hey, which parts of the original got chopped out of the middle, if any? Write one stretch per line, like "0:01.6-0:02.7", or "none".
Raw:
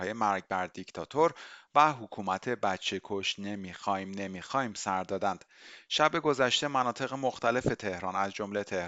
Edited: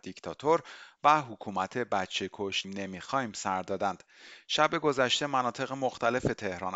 0:03.4-0:04.1